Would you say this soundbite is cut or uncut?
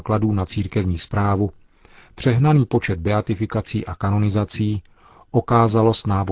uncut